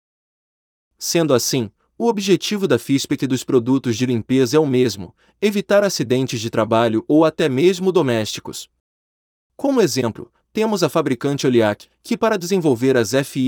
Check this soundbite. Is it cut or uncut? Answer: uncut